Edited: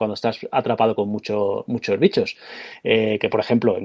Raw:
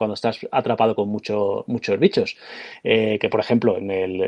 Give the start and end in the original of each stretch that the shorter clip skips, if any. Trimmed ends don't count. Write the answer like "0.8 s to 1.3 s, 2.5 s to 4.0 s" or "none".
none